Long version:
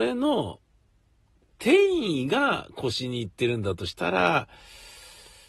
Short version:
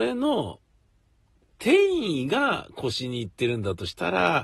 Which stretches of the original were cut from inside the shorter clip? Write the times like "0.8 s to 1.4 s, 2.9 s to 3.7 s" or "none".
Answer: none